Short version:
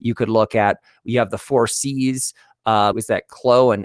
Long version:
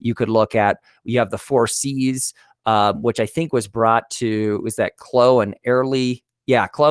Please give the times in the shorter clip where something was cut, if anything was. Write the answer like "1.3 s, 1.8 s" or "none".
2.9 s

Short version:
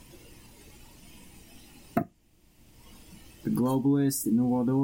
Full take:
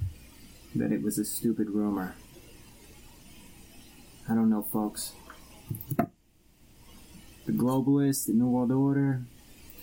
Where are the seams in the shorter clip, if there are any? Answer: 1.9 s

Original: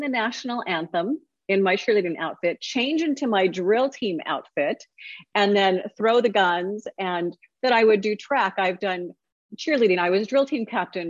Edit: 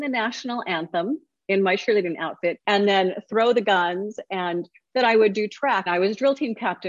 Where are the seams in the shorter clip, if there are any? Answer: 2.6 s, 5.9 s

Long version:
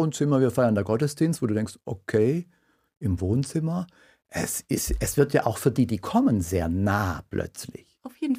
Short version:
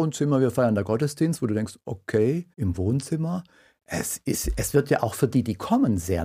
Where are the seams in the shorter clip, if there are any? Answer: 2.5 s

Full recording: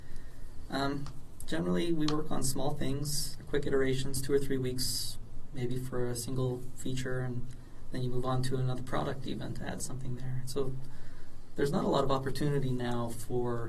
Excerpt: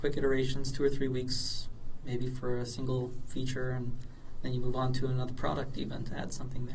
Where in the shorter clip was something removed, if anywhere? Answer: none

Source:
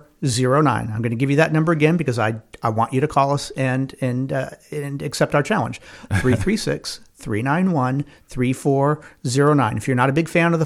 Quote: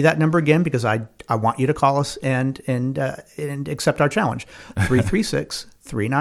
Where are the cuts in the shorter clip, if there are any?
none

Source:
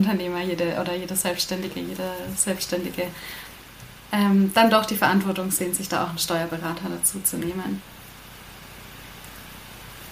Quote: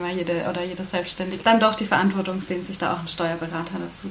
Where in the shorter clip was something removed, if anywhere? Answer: 1.4 s

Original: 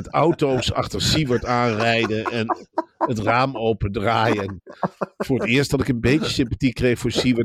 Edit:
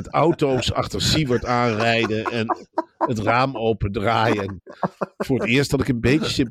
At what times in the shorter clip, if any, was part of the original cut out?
none

